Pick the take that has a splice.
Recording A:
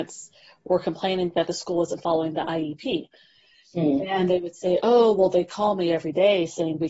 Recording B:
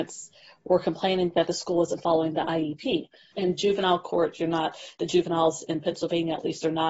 B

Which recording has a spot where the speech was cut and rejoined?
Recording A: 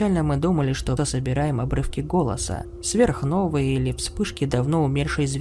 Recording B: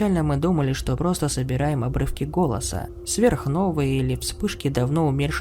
A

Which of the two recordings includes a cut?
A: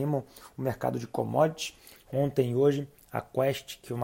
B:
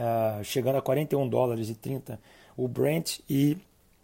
A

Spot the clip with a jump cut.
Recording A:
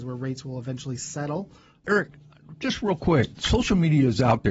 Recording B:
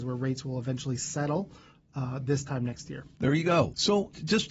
A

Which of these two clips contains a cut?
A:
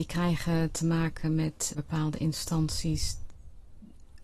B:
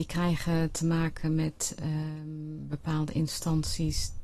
A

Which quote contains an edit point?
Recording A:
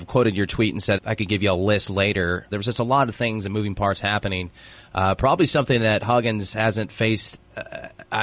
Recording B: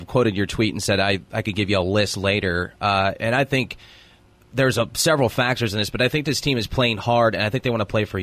A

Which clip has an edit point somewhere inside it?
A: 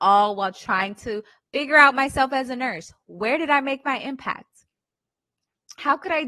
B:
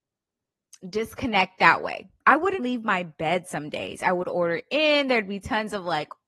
B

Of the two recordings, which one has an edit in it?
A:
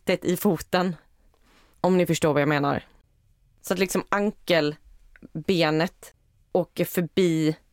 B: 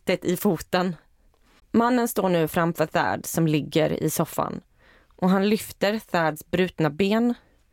B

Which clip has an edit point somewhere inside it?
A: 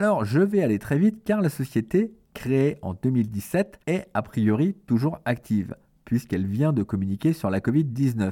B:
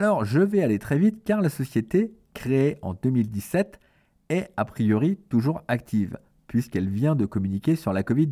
A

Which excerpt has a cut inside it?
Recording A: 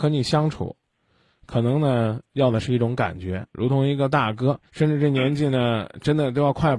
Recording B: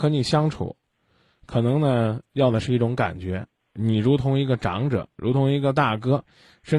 A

